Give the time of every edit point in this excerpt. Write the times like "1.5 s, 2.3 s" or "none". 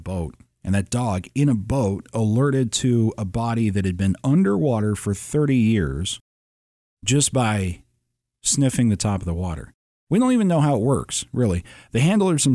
none